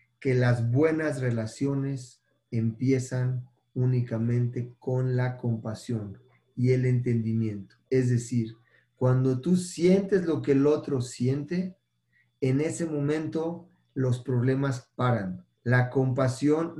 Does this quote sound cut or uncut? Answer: cut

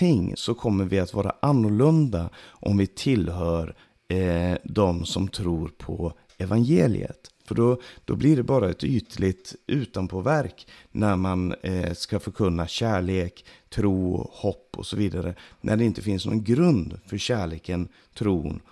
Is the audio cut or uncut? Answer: cut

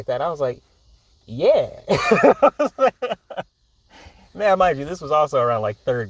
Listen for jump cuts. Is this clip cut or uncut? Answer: uncut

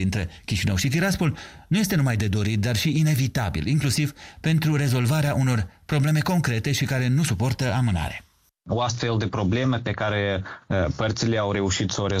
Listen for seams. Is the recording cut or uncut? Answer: uncut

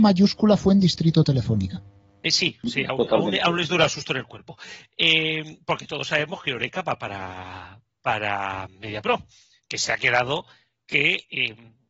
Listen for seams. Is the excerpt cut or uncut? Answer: uncut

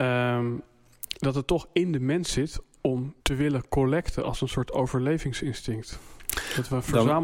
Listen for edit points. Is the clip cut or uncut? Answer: cut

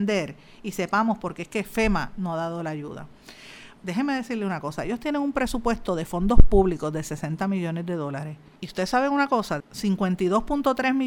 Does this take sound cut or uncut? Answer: cut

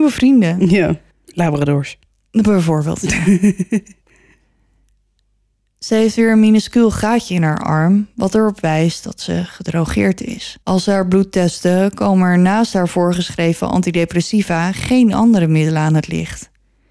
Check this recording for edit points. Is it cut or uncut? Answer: cut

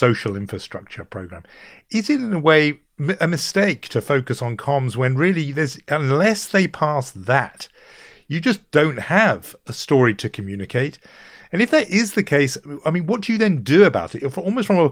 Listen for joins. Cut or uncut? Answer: uncut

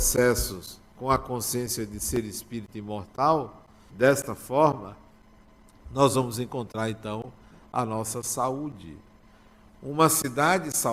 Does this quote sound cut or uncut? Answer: cut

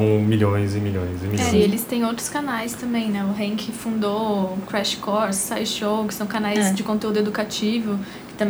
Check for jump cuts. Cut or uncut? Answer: uncut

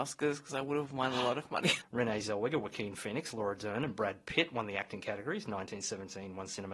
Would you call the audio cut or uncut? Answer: cut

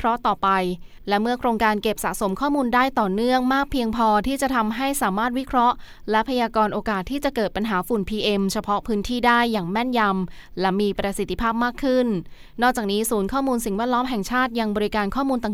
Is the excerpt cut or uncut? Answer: uncut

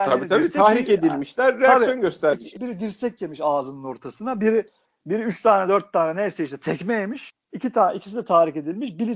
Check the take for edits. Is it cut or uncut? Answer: cut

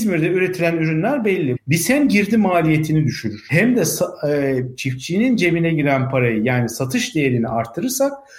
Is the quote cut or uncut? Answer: cut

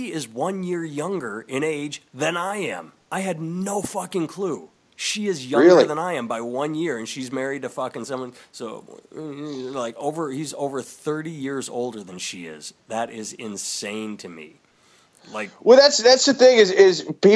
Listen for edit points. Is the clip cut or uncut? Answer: uncut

